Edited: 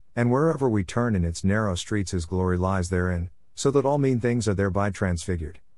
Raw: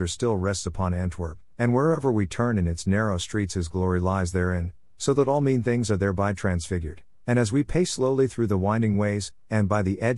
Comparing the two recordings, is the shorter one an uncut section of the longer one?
yes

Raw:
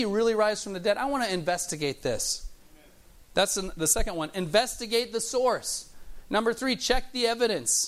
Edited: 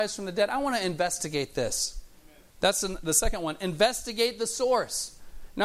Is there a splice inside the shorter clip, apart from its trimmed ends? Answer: yes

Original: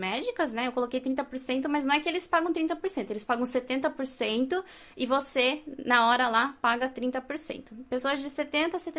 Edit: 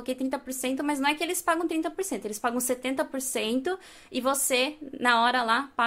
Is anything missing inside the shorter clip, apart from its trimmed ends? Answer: no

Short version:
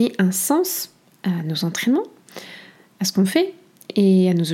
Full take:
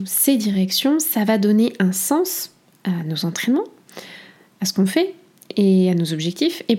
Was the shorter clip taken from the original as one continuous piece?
yes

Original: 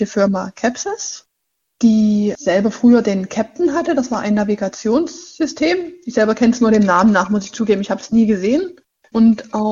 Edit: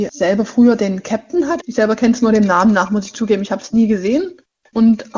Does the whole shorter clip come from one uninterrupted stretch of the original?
no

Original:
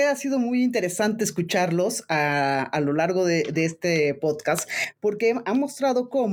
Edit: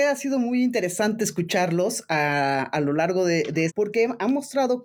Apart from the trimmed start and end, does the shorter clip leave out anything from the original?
yes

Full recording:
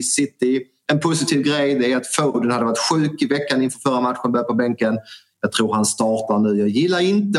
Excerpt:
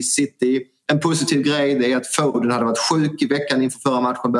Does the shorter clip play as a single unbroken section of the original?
yes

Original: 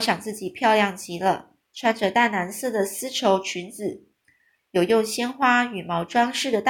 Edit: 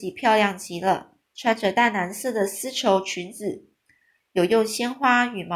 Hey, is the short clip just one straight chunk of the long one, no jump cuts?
yes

